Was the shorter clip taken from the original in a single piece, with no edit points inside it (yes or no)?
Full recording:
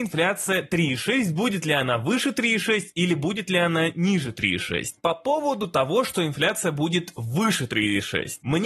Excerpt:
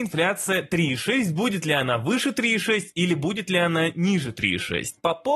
yes